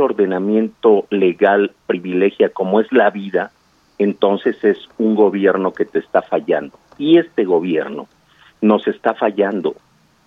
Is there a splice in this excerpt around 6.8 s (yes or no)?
no